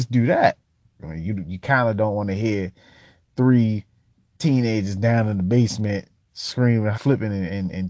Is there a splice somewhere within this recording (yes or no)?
yes